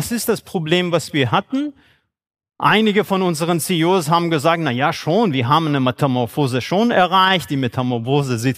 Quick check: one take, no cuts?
yes; 0 cuts

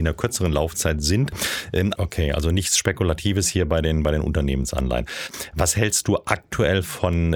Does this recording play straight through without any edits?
no; 1 cut; at 2.0 s

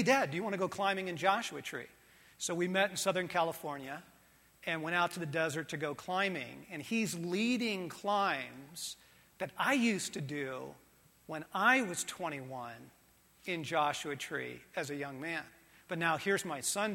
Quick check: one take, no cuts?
yes; 0 cuts

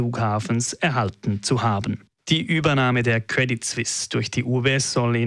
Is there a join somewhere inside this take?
no; 0 cuts

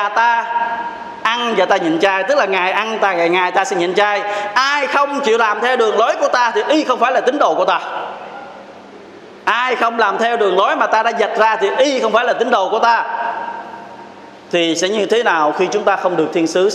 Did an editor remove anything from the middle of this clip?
no; 0 cuts

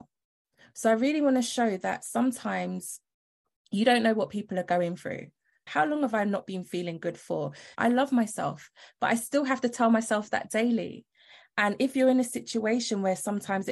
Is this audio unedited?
no; 2 cuts; at 5.7 s, 7.7 s

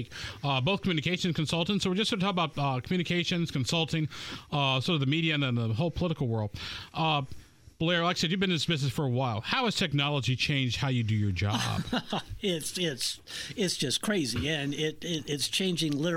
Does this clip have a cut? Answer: no; 0 cuts

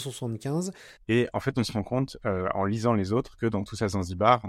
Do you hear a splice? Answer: yes; 1 cut; at 1.0 s

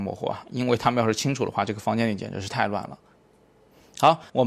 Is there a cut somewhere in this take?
no; 0 cuts

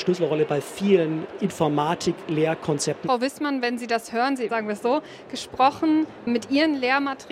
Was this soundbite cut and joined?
yes; 2 cuts; at 3.0 s, 4.5 s

